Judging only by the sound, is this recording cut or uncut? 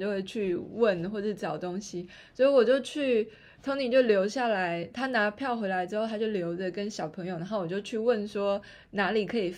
uncut